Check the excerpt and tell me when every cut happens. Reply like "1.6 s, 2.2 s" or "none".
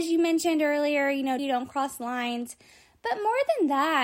1.4 s